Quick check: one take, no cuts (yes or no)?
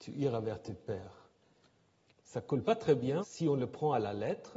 no